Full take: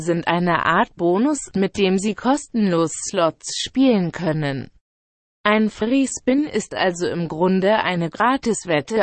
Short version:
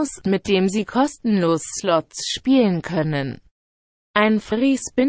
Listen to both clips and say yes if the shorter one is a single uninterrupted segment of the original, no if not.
yes